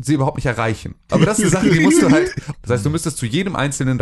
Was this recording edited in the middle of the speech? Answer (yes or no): yes